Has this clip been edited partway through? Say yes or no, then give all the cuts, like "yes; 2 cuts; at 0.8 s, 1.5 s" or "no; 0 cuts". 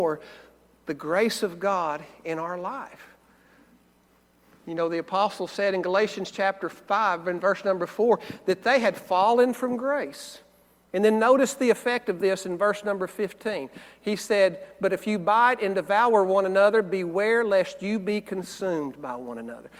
no; 0 cuts